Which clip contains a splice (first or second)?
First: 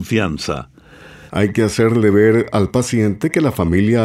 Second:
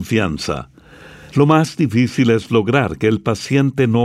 first